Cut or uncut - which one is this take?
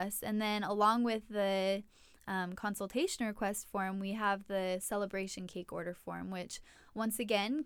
uncut